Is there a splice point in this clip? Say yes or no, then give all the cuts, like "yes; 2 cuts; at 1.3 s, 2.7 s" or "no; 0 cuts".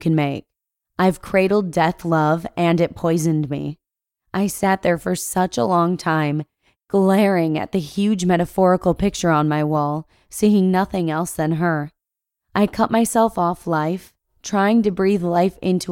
no; 0 cuts